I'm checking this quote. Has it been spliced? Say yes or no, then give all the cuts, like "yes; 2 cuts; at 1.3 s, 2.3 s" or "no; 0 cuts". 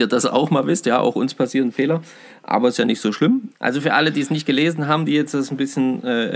yes; 1 cut; at 3.5 s